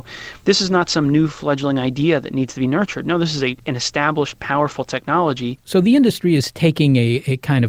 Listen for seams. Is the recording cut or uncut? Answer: uncut